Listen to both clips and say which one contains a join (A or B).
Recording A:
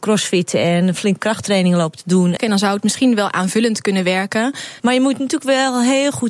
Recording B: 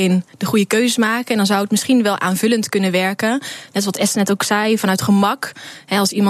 A